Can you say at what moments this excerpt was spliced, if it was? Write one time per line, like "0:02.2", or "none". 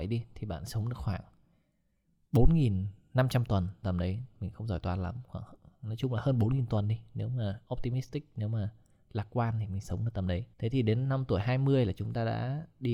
0:03.8
0:10.5